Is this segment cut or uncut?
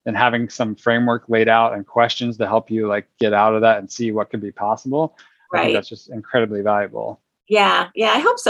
uncut